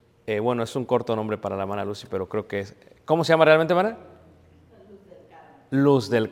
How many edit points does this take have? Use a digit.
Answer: 0